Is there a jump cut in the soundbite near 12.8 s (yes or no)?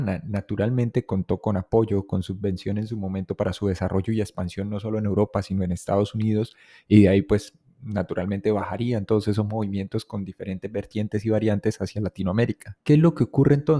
yes